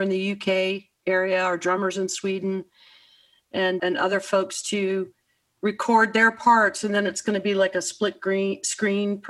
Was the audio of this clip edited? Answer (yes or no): yes